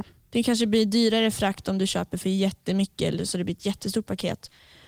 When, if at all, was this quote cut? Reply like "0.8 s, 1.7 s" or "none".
none